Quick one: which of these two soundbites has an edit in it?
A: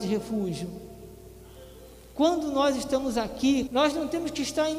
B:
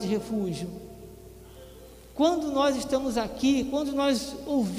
A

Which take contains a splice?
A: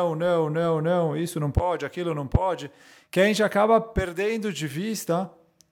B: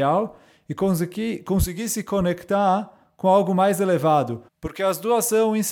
B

